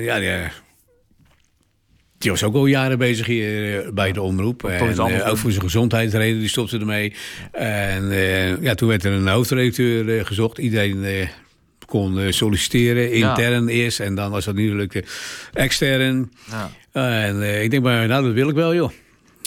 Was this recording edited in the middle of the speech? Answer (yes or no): no